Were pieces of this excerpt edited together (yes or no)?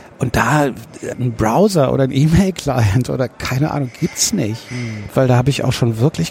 yes